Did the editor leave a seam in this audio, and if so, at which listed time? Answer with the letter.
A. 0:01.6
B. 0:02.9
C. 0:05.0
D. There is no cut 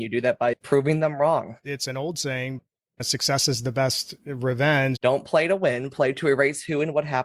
C